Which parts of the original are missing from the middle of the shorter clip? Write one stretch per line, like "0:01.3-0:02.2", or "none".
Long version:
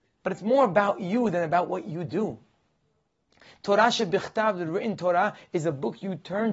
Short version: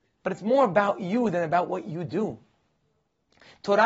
none